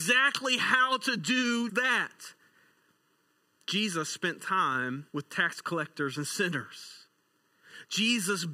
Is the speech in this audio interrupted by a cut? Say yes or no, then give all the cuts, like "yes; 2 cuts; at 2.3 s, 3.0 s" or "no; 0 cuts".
yes; 2 cuts; at 1.7 s, 5.1 s